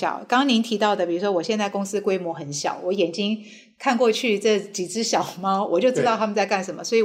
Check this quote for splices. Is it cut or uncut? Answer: uncut